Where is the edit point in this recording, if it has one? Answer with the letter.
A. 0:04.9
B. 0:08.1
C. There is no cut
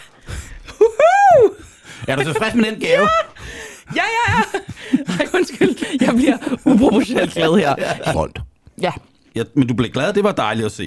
B